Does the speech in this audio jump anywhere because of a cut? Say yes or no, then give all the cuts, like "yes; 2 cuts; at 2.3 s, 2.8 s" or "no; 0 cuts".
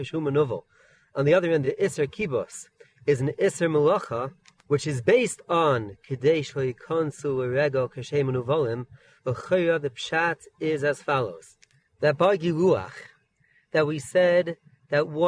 no; 0 cuts